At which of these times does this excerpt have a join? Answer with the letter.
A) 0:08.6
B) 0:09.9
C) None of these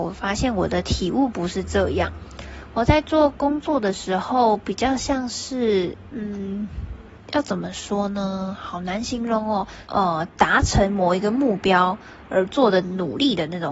B